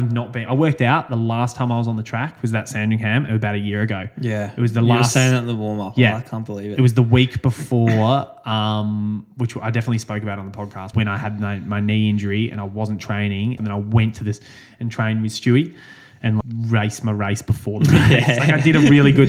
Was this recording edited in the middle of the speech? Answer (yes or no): yes